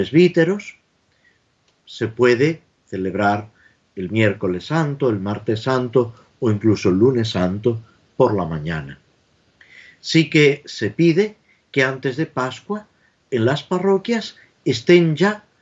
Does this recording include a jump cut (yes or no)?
no